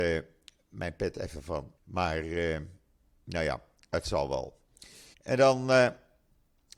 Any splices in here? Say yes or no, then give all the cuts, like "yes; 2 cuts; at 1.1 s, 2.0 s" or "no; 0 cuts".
yes; 2 cuts; at 1.8 s, 5.1 s